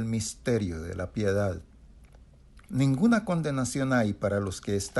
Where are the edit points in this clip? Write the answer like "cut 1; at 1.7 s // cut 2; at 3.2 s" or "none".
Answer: cut 1; at 2.7 s